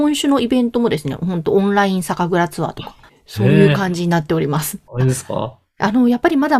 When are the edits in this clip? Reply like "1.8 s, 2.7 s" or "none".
3.1 s, 4.9 s